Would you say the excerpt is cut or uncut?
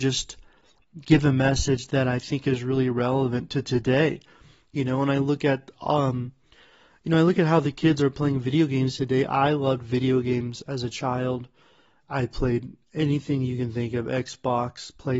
uncut